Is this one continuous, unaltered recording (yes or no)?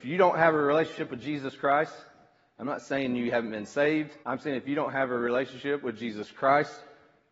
no